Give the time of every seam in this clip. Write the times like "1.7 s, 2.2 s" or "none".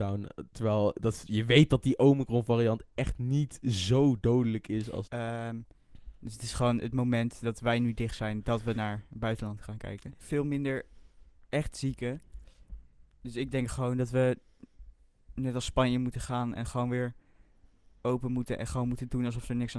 5.0 s, 10.2 s